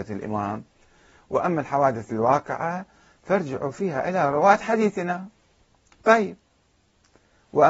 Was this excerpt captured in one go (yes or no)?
yes